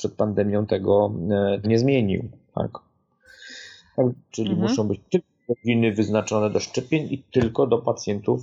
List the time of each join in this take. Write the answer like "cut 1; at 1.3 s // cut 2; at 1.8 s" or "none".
cut 1; at 1.6 s // cut 2; at 4.3 s